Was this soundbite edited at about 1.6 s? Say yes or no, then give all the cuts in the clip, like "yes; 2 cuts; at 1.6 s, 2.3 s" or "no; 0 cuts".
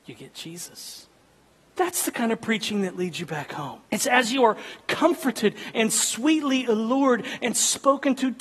yes; 2 cuts; at 1.6 s, 3.9 s